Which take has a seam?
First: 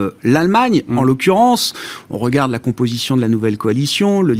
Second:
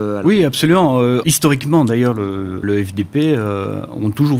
second; 2 cuts; at 1.2 s, 2.6 s

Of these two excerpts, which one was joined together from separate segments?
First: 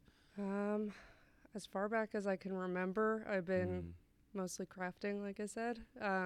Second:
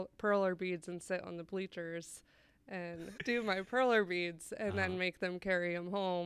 second; 1 cut; at 3.2 s

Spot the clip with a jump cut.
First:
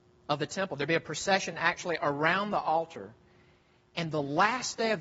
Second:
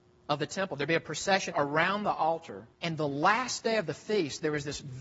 second; 2 cuts; at 1.5 s, 2.7 s

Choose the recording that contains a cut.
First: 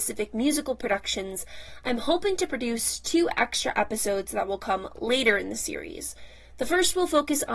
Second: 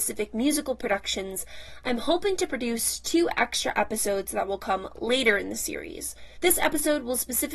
second; 1 cut; at 6.4 s

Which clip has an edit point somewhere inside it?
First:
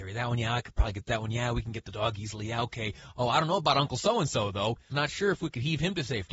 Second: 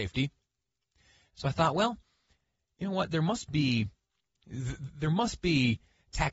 first; 1 cut; at 4.9 s

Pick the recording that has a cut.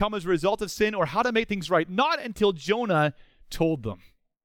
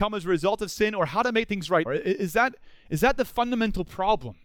second; 1 cut; at 1.9 s

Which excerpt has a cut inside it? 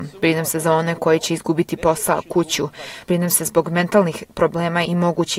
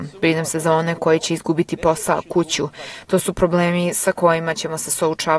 second; 1 cut; at 3.0 s

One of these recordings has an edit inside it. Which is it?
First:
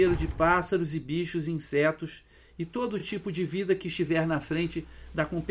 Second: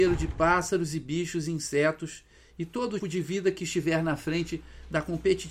second; 1 cut; at 3.0 s

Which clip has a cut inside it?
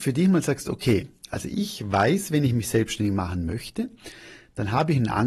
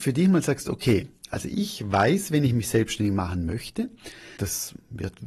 second; 1 cut; at 4.4 s

